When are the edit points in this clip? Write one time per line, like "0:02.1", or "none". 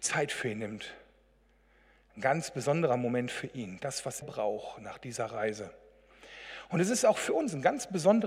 0:04.2